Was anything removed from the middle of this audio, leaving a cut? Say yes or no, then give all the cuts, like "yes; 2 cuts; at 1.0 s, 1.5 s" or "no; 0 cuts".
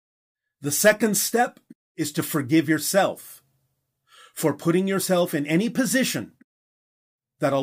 no; 0 cuts